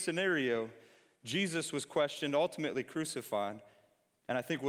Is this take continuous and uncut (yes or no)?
yes